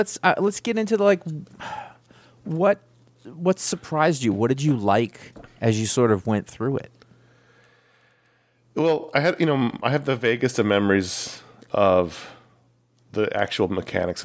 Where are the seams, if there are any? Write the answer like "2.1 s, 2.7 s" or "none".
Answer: none